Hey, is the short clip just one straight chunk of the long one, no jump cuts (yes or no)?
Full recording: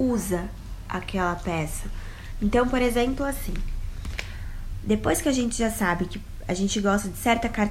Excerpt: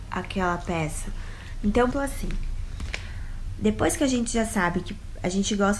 no